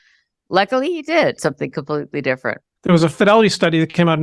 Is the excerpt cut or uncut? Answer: cut